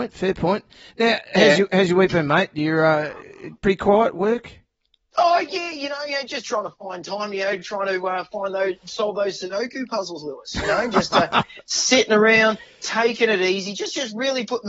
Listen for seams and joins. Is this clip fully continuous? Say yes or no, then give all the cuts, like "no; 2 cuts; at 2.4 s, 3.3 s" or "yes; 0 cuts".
yes; 0 cuts